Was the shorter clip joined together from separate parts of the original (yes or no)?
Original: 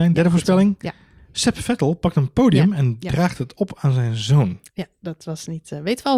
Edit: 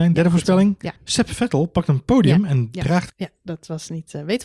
yes